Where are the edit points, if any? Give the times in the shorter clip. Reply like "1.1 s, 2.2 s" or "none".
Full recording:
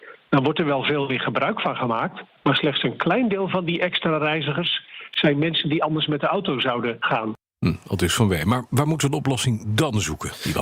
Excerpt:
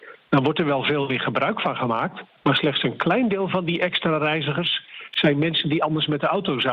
none